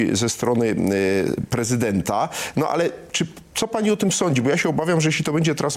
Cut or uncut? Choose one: uncut